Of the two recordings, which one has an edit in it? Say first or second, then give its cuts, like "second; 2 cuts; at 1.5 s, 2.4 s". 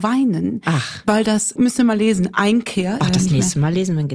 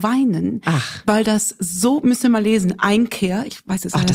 first; 2 cuts; at 1.6 s, 3.0 s